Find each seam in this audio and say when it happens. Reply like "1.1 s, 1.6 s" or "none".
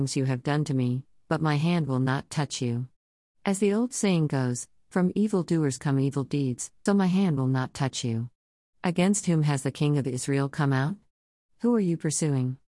6.9 s

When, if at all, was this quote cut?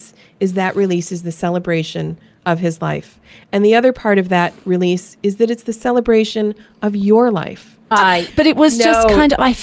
7.9 s

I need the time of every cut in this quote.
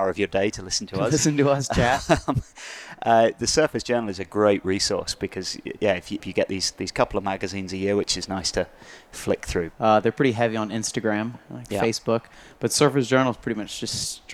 6.2 s, 9.7 s

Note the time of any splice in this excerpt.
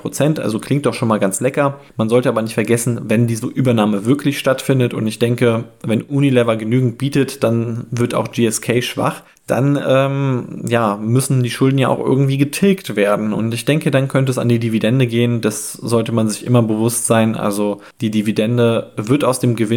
none

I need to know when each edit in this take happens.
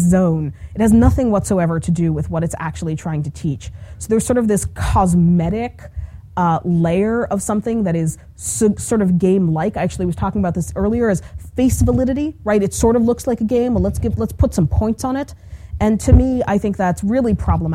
none

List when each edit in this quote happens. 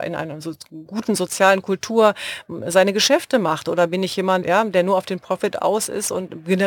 4.4 s

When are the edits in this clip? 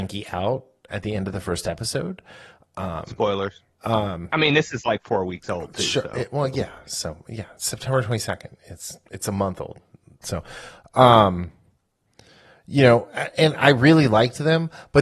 3.7 s

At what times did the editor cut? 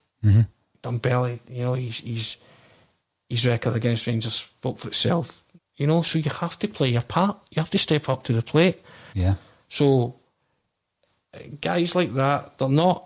5.6 s, 9.1 s

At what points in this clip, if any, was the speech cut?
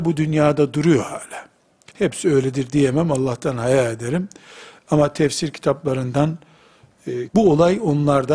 1.9 s, 7.3 s

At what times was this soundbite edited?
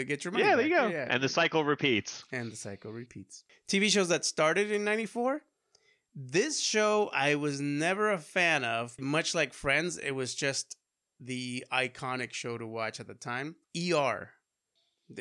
9.0 s, 13.6 s

